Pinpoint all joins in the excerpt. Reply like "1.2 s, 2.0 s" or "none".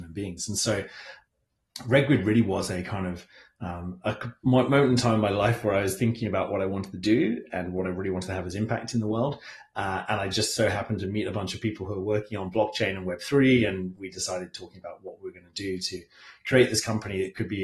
none